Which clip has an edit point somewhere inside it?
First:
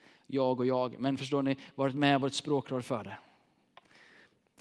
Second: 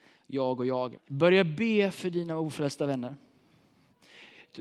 second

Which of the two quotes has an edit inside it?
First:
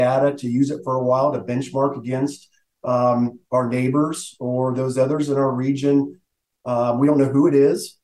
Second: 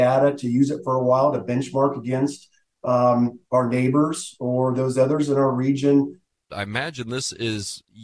second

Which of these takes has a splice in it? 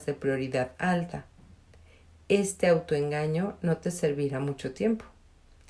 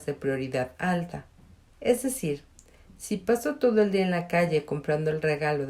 second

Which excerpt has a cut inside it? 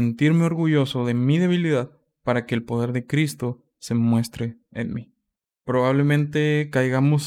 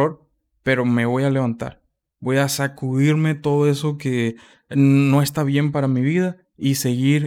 first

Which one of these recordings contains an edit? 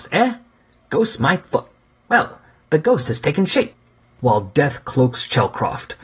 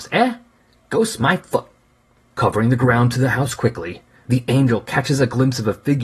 first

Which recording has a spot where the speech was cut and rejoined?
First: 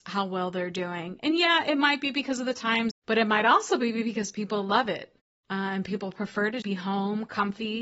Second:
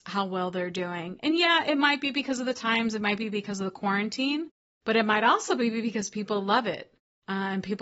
first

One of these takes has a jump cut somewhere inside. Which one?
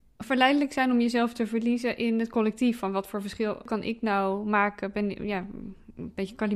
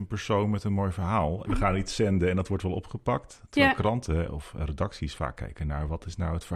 second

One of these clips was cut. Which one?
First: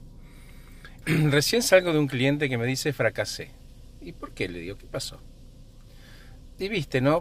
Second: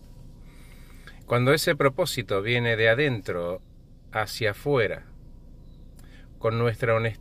first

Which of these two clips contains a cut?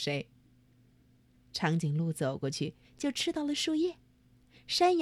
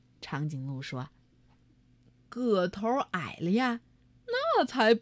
first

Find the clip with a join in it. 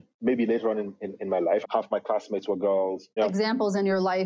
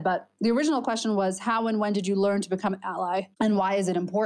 first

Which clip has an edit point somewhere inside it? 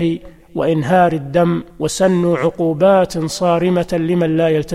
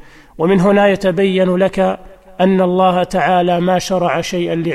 first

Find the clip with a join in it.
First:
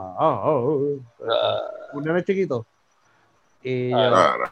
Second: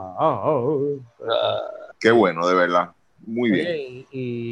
second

